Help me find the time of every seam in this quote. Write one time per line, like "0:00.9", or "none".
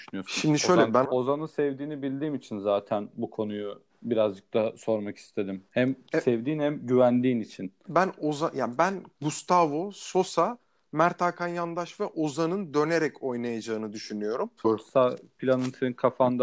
0:01.0
0:07.9
0:14.6